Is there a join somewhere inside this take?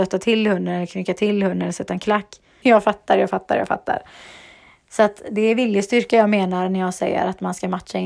yes; 1 cut; at 2.6 s

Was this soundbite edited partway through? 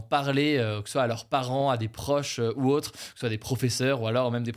no; 0 cuts

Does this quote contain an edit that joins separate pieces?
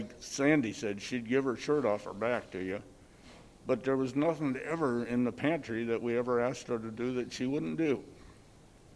no; 0 cuts

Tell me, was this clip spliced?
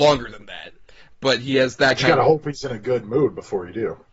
no; 0 cuts

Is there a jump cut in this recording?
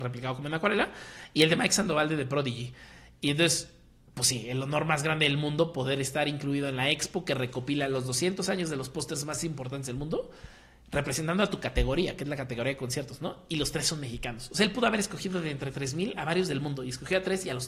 no; 0 cuts

